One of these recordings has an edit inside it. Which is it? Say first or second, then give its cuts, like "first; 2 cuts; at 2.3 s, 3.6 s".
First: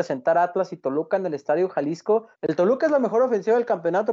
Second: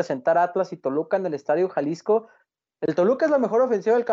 first; 1 cut; at 2.3 s